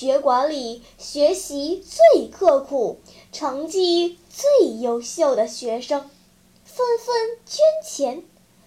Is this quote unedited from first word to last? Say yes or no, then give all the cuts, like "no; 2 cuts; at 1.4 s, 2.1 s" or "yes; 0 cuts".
no; 1 cut; at 6.7 s